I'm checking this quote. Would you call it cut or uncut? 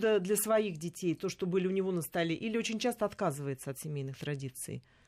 uncut